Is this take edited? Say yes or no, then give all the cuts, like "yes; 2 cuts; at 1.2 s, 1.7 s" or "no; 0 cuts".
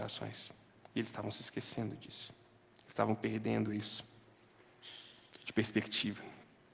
no; 0 cuts